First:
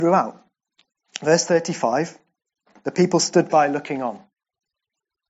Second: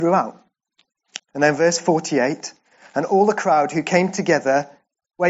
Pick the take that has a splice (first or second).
second